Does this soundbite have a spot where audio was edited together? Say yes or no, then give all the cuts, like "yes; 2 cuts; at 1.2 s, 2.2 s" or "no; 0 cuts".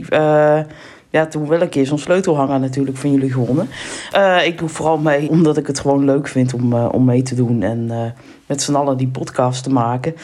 yes; 2 cuts; at 4.1 s, 5.3 s